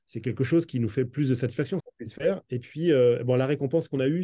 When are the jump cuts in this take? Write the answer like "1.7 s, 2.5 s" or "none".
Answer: 1.8 s